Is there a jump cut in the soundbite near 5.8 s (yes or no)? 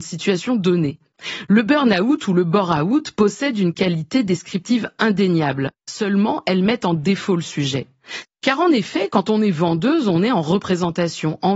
no